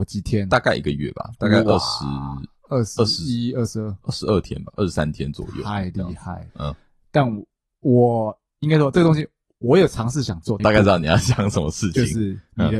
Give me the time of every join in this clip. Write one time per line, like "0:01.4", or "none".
0:06.5
0:10.6